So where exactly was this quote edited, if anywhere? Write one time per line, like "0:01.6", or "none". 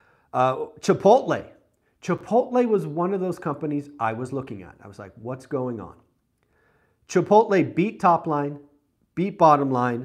none

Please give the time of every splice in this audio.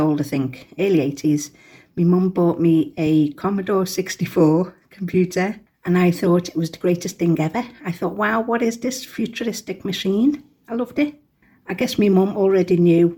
none

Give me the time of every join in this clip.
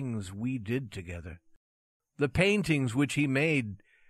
0:02.0

